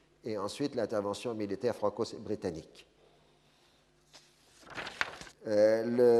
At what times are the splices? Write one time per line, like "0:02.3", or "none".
0:05.3

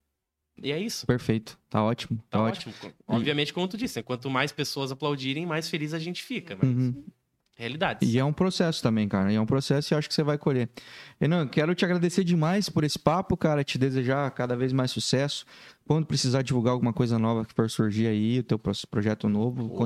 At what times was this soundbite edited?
none

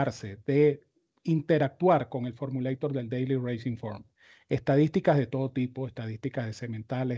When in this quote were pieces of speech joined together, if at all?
none

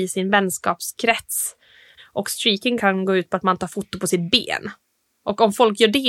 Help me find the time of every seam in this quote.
0:02.0

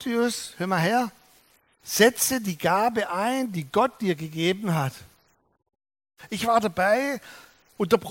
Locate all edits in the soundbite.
none

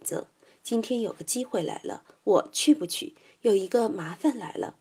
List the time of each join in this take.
none

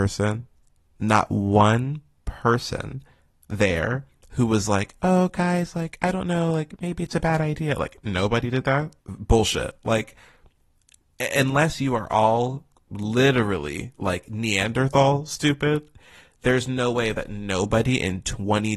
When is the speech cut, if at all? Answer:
0:09.0
0:13.9

